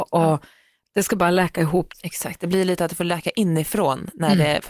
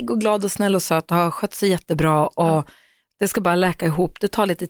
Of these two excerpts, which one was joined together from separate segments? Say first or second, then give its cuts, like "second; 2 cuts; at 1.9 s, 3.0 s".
first; 1 cut; at 1.9 s